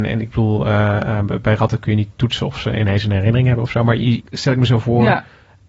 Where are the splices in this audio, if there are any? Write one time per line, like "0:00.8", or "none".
0:04.2